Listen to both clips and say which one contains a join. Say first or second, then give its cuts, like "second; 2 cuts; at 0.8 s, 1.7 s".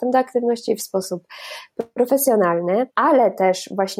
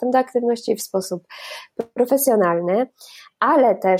first; 1 cut; at 2.9 s